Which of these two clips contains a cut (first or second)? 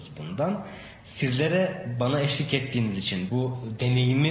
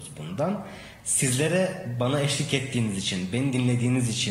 first